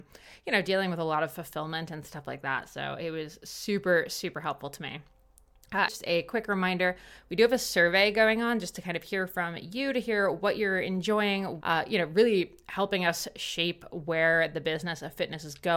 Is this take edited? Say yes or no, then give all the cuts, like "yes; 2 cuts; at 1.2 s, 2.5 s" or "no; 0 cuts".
yes; 2 cuts; at 5.9 s, 11.6 s